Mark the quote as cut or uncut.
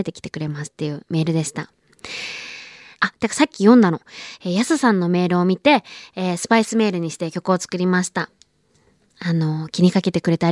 cut